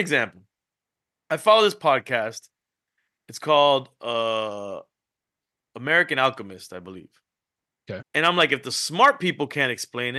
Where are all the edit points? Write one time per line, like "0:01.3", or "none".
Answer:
0:08.0